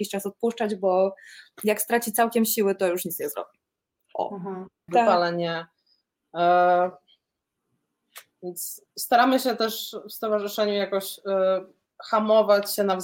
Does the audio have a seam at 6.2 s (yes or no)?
no